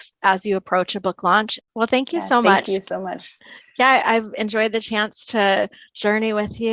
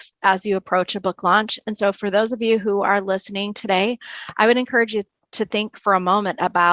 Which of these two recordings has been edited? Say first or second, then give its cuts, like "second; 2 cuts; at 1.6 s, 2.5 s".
first; 1 cut; at 1.6 s